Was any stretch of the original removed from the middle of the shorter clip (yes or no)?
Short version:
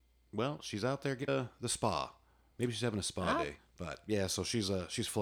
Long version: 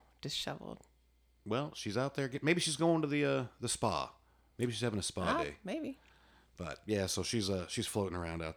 yes